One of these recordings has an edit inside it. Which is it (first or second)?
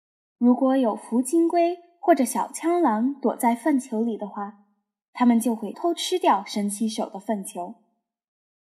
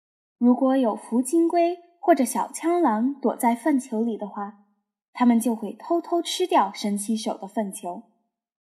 first